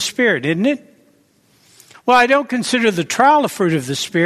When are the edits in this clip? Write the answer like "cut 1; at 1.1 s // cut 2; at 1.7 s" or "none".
cut 1; at 1.9 s